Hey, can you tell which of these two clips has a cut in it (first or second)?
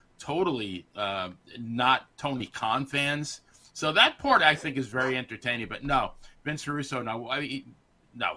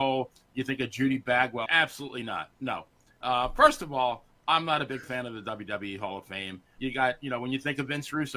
second